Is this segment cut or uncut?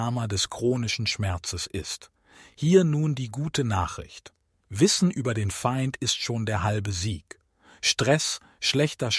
uncut